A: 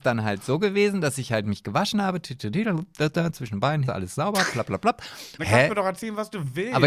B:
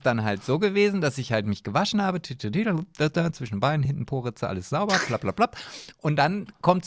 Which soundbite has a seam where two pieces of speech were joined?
A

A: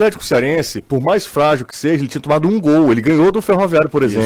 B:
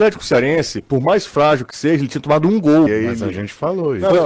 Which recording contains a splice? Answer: B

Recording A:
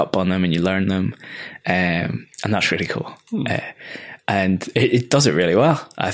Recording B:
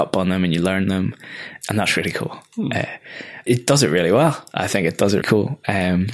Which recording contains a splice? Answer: B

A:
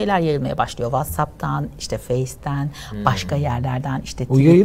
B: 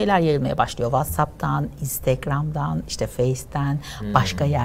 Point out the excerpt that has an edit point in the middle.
A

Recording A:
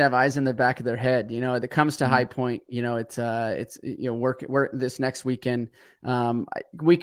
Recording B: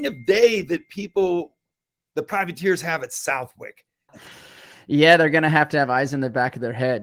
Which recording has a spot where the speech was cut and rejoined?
B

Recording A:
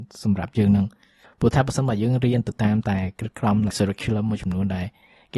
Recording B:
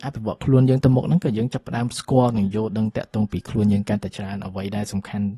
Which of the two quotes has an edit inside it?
A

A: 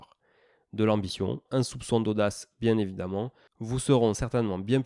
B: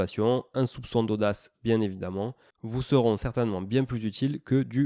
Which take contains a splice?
A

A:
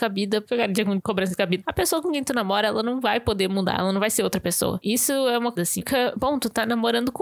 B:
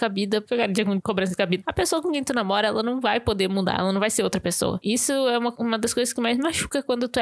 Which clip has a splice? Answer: A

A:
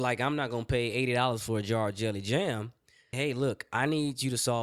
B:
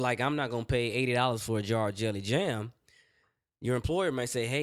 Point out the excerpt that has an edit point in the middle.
A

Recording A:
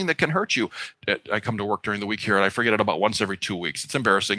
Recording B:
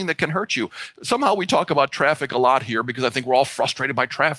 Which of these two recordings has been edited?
A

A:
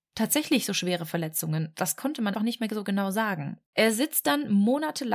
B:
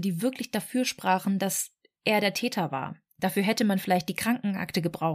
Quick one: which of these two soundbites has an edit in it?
A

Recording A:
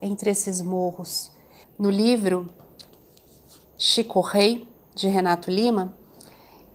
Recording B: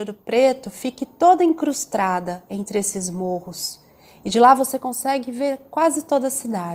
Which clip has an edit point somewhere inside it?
A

